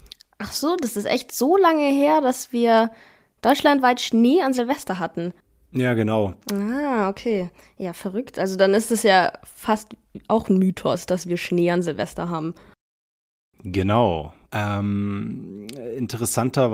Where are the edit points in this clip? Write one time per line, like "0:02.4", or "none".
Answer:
0:06.4
0:14.4